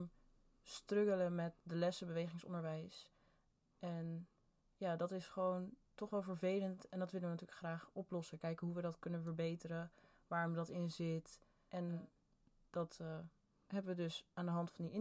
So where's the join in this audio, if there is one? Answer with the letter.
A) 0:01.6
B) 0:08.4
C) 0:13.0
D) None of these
A